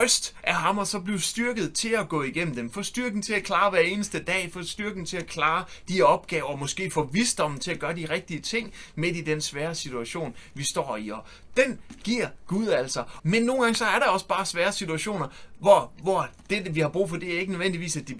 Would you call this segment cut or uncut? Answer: cut